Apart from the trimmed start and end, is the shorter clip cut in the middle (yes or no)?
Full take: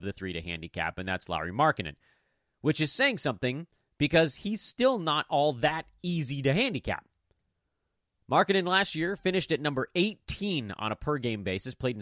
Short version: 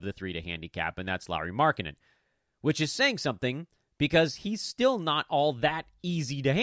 no